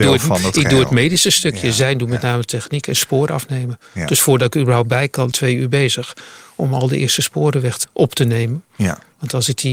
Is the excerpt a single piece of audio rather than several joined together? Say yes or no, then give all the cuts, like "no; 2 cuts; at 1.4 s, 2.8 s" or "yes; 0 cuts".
no; 2 cuts; at 5.3 s, 7.8 s